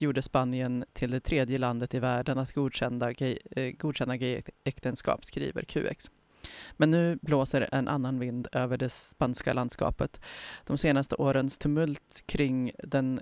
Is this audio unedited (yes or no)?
yes